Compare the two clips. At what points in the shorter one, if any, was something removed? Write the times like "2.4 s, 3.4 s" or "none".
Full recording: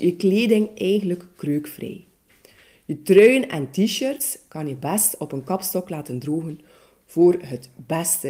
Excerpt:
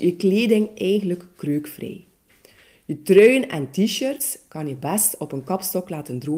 none